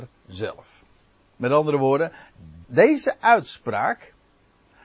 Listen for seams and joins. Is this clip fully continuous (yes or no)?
no